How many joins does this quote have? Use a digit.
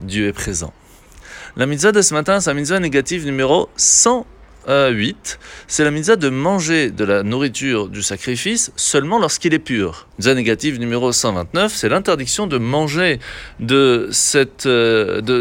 1